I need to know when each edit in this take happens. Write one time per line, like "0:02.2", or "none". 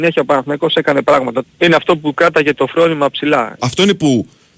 0:01.4
0:03.6